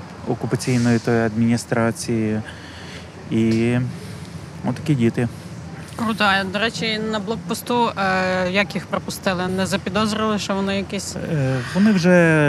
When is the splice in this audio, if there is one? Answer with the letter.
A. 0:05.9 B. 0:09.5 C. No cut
B